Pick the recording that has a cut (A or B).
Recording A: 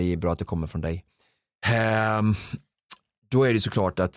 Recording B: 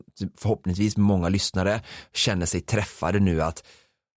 A